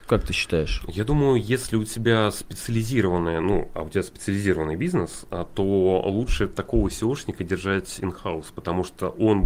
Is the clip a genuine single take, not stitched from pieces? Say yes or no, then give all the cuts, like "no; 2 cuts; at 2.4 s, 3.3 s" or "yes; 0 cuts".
yes; 0 cuts